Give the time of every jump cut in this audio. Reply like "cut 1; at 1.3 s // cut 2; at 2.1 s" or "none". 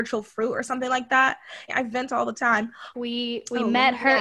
cut 1; at 1.7 s // cut 2; at 2.9 s